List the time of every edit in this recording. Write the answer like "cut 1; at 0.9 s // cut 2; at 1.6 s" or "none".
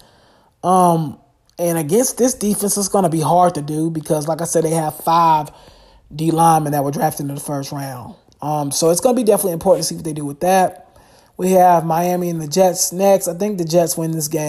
none